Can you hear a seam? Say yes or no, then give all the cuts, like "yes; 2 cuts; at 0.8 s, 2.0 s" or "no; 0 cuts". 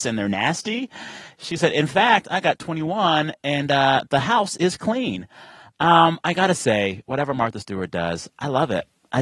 no; 0 cuts